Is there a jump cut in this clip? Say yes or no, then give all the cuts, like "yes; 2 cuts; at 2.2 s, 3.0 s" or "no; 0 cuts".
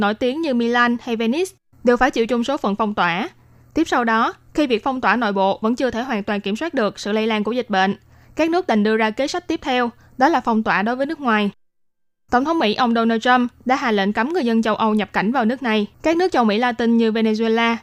yes; 1 cut; at 15.9 s